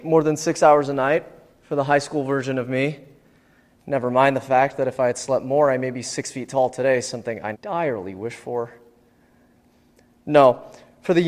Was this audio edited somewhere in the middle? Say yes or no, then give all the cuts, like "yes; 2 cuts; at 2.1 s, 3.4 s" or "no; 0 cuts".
yes; 1 cut; at 7.5 s